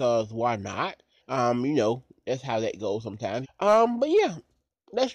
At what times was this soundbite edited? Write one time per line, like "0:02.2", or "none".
0:01.2
0:03.4